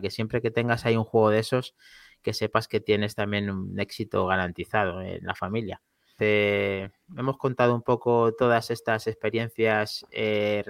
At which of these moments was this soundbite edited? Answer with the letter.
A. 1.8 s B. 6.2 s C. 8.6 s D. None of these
B